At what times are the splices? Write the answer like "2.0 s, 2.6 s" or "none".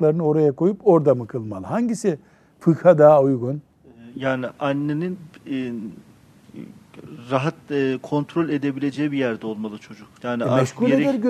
10.1 s